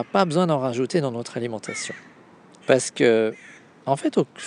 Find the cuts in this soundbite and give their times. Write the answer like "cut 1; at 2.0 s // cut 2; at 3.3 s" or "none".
cut 1; at 2.6 s